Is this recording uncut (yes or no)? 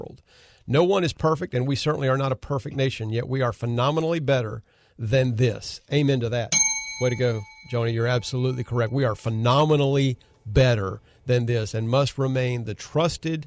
yes